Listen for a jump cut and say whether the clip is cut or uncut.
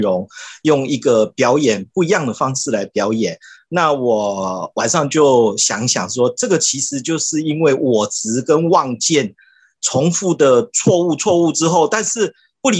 uncut